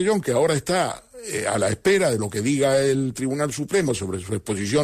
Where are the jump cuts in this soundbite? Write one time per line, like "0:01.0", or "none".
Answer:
none